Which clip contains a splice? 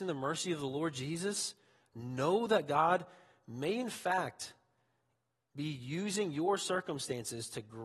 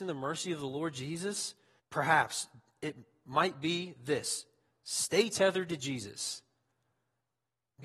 second; 1 cut; at 1.8 s

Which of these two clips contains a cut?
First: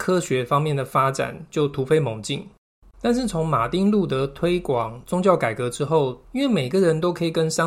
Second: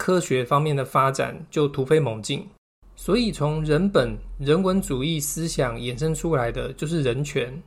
first; 2 cuts; at 2.9 s, 6.2 s

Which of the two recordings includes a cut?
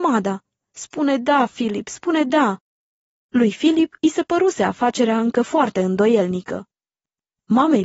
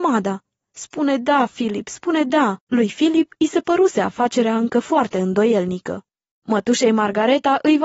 second; 2 cuts; at 2.6 s, 6.3 s

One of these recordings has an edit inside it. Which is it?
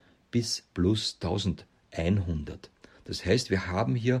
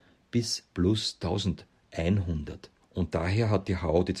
second; 1 cut; at 2.8 s

